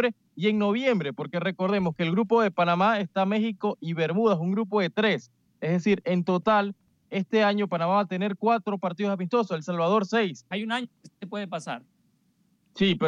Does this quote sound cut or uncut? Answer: cut